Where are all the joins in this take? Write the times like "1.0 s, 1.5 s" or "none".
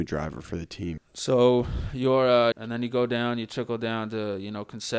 1.0 s, 2.5 s